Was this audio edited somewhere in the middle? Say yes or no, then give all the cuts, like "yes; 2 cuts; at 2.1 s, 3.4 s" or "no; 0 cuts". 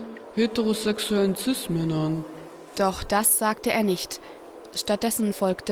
no; 0 cuts